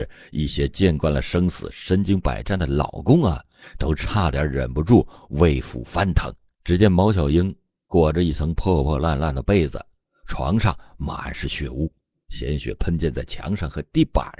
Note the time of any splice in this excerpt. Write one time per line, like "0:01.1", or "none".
0:06.5